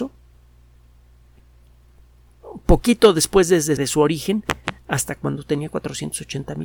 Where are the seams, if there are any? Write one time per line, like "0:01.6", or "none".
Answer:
0:03.8